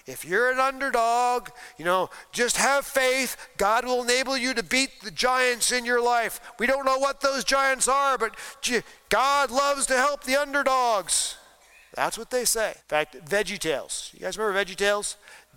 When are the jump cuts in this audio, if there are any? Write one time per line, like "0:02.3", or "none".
0:12.8